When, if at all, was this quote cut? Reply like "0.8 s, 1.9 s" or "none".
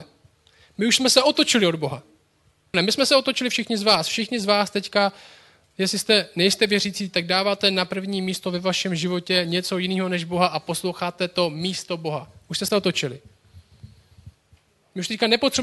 2.7 s